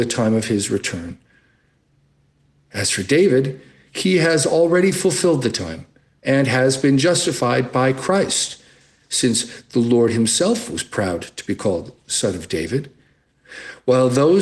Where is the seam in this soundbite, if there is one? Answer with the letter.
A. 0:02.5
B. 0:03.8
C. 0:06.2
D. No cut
C